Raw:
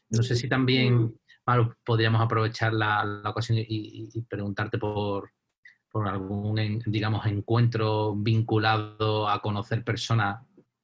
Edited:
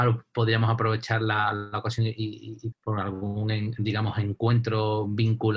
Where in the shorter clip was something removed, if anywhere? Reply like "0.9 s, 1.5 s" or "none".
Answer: 2.7 s